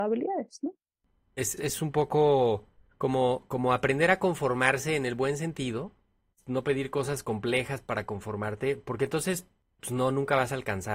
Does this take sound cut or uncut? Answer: cut